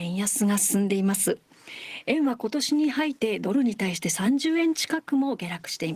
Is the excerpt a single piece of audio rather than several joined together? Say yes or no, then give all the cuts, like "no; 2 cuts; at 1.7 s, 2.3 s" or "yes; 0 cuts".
no; 1 cut; at 3.2 s